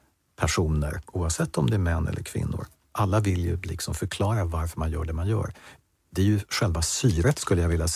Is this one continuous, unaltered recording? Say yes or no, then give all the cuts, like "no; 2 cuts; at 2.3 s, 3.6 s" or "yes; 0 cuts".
yes; 0 cuts